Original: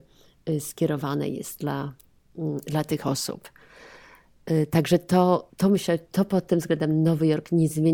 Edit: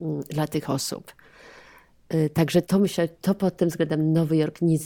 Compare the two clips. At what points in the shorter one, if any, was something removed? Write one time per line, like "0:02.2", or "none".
0:02.6